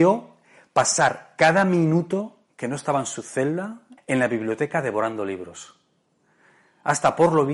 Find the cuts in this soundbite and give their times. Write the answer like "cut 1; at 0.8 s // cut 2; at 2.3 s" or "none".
cut 1; at 4.0 s

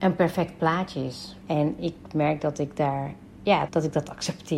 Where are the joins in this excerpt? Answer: cut 1; at 1.4 s // cut 2; at 3.7 s

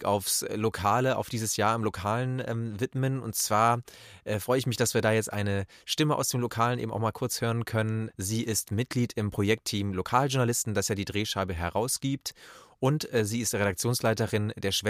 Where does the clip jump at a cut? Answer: cut 1; at 8.1 s

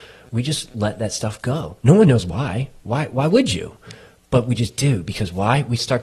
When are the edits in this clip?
none

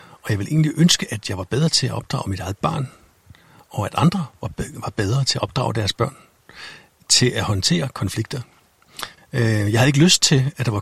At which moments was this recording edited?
cut 1; at 9.2 s

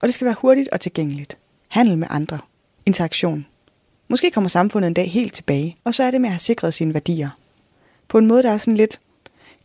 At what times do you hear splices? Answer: cut 1; at 1.6 s // cut 2; at 5.8 s

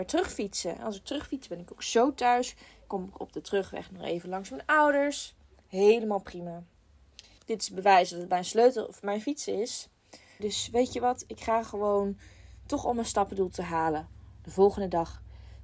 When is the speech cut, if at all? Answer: cut 1; at 7.4 s // cut 2; at 10.4 s

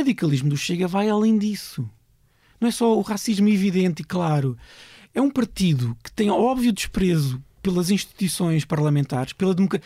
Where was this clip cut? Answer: none

